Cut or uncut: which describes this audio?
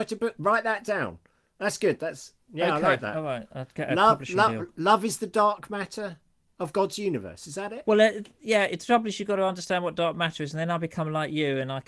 uncut